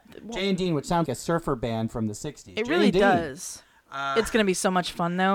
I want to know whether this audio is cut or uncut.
cut